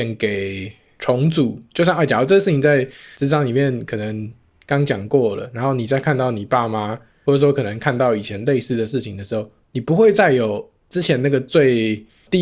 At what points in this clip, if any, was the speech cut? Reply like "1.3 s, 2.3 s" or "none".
none